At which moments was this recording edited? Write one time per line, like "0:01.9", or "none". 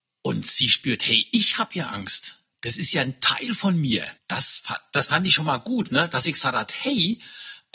0:04.2
0:05.9